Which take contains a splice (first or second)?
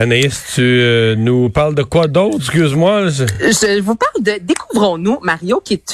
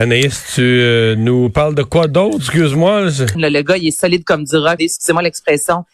second